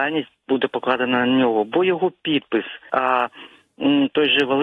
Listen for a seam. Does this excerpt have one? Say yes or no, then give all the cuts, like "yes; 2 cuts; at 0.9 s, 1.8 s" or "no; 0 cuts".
yes; 1 cut; at 2.9 s